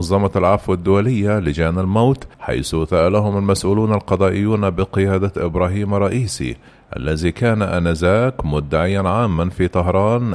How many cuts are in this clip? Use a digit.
1